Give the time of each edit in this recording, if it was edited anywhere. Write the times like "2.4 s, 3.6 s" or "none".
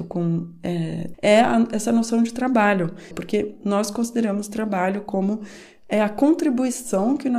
1.1 s, 3.1 s